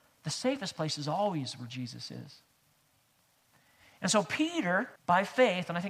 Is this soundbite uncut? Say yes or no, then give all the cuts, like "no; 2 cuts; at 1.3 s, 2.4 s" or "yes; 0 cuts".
no; 1 cut; at 5.0 s